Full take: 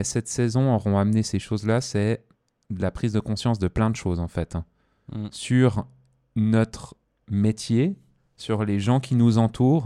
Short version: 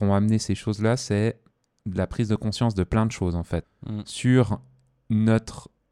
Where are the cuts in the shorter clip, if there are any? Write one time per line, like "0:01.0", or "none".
0:03.6